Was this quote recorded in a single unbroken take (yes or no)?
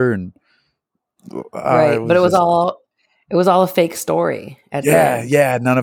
yes